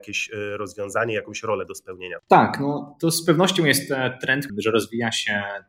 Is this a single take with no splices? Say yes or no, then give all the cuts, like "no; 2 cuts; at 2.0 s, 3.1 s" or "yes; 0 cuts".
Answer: no; 2 cuts; at 2.2 s, 4.5 s